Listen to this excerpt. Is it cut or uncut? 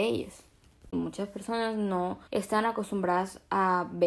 cut